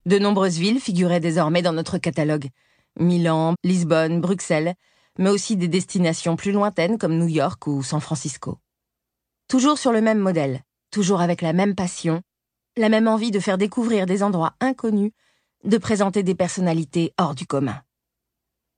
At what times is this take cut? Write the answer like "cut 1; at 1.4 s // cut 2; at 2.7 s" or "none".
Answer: cut 1; at 3.5 s